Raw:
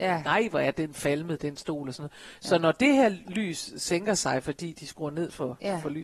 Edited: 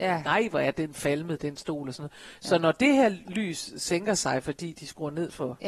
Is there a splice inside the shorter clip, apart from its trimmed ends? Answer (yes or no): no